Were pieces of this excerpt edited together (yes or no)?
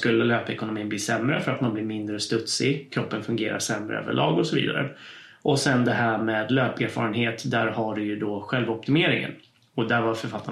no